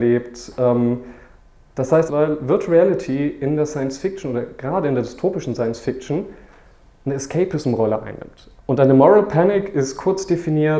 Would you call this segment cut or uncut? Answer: cut